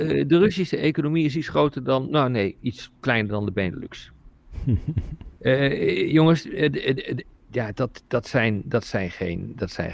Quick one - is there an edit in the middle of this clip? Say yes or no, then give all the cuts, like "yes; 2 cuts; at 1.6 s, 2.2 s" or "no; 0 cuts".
no; 0 cuts